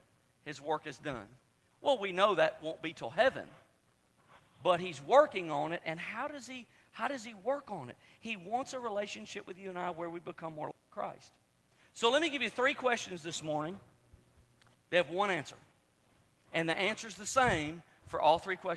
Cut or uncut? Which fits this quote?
cut